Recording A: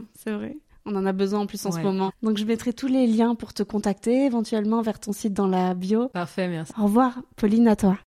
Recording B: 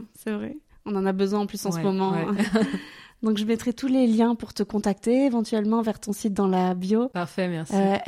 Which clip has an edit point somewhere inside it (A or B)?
A